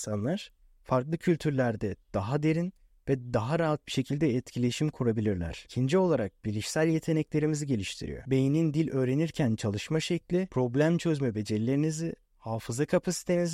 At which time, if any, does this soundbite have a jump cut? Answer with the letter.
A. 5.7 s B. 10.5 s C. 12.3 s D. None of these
D